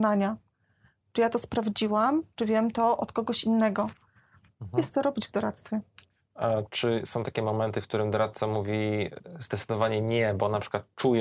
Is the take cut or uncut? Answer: cut